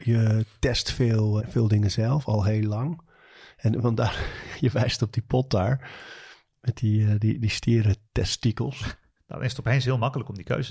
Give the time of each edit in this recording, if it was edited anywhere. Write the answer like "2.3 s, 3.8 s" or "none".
1.4 s, 9.2 s